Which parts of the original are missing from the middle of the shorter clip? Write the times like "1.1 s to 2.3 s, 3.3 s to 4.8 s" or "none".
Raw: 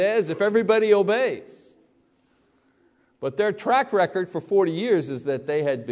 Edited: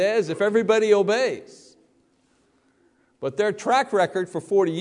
none